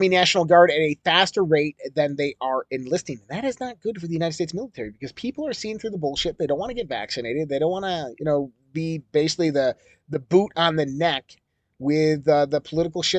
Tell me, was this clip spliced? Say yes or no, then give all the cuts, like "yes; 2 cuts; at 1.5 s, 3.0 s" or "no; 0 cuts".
no; 0 cuts